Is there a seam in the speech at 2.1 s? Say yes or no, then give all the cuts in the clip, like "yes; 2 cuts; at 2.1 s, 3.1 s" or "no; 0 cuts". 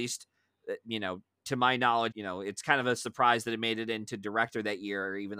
yes; 1 cut; at 2.1 s